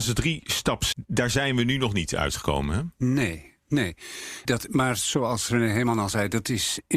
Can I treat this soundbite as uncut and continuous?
no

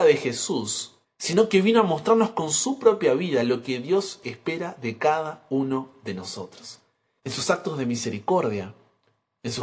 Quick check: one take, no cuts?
no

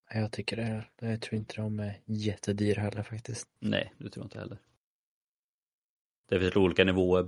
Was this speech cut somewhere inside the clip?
no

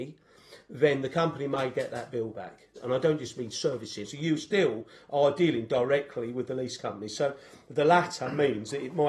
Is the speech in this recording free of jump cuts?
no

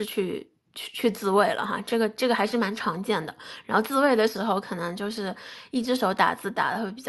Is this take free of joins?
yes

